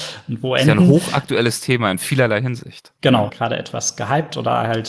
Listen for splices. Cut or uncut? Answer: cut